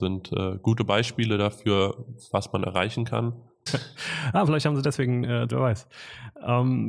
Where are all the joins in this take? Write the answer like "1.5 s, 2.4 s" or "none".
3.7 s, 5.5 s